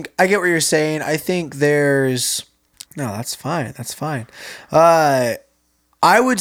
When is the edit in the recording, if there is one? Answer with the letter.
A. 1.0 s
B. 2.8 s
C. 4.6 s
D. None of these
B